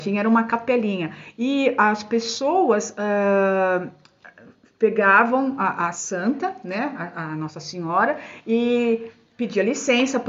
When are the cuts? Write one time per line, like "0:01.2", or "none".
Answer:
none

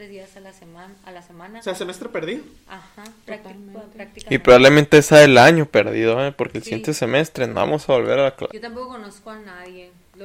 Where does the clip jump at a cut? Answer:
0:08.5

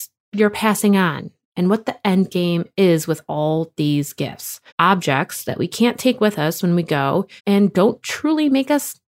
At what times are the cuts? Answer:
0:04.7
0:07.4

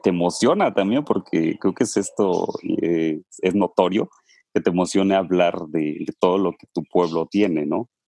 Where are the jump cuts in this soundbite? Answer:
none

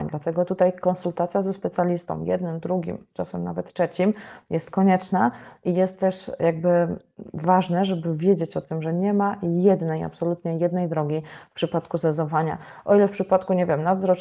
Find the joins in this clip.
none

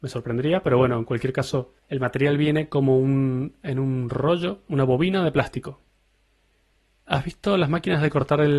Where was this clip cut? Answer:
0:01.8

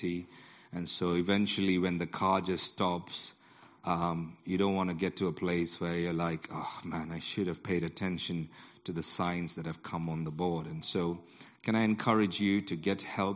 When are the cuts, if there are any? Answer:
none

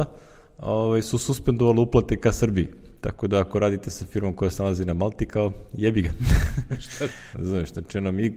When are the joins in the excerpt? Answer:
0:07.3

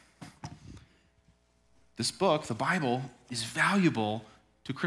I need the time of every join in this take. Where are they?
none

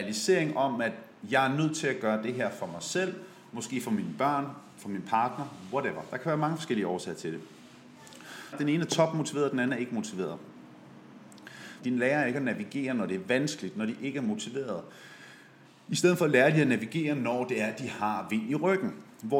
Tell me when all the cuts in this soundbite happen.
0:08.5
0:11.8

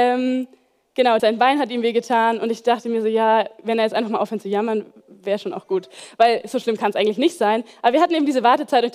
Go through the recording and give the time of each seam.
0:01.2

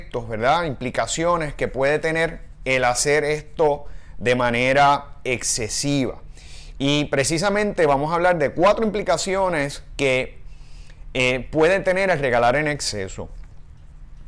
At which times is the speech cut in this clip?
0:06.8

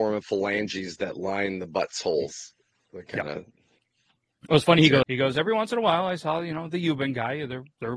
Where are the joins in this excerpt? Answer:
0:05.0

